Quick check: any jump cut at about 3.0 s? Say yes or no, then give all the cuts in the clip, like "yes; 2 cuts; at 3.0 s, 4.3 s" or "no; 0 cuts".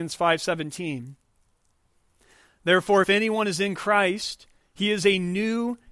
no; 0 cuts